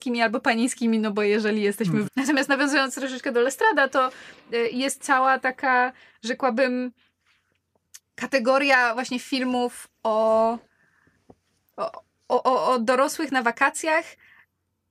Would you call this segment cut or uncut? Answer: cut